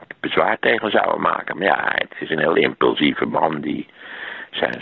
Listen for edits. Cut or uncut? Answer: uncut